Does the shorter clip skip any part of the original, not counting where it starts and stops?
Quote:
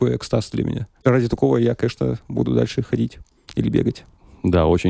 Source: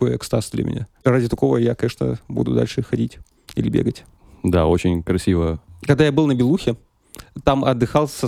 no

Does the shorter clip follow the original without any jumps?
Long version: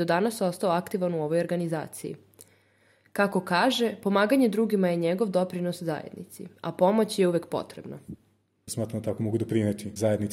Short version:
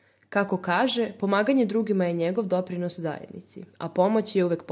yes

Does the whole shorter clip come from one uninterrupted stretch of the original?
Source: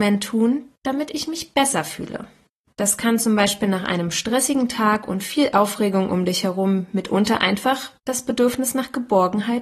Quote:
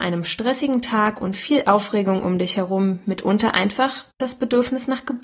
yes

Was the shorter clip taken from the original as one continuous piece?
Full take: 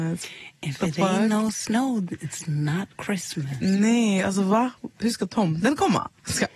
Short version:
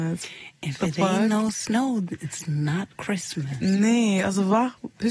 yes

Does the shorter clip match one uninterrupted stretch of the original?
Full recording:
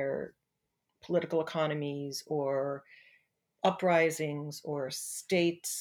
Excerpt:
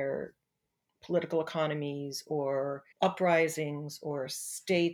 no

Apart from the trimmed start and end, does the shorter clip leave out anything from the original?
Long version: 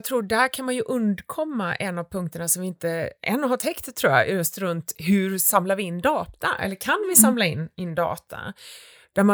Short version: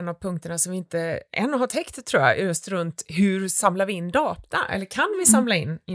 no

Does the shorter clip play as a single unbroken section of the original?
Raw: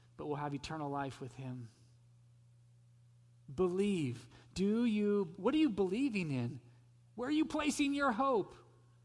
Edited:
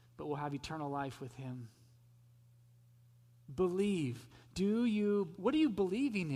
yes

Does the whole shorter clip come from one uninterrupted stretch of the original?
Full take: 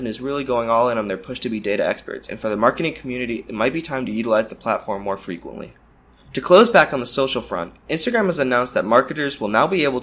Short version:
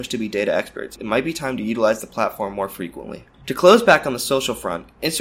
no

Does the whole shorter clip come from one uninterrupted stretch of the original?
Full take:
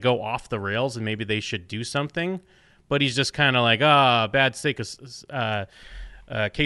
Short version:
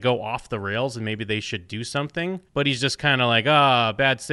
no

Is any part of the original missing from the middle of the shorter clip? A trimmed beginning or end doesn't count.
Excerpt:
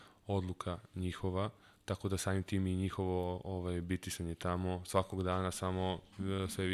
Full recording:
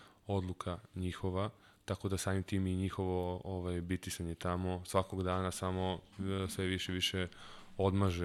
no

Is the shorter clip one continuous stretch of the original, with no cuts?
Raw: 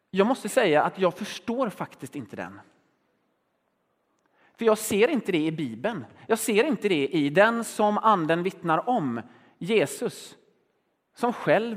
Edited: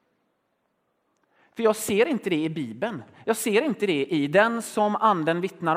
yes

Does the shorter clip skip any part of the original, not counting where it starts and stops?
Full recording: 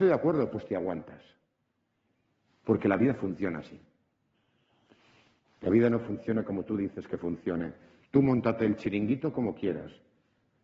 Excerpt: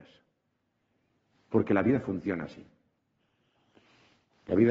no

